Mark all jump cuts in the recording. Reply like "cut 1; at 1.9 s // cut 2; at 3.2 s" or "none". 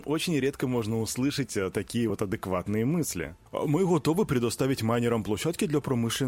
none